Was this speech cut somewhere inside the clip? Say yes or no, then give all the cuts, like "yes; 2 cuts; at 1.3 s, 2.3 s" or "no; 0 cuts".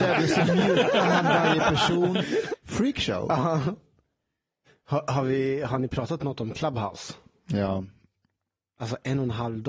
yes; 1 cut; at 2.5 s